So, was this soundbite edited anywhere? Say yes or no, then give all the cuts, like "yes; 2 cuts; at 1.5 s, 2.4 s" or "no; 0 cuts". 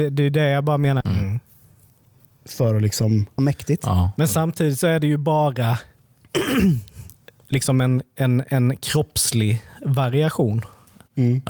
yes; 2 cuts; at 1.0 s, 3.4 s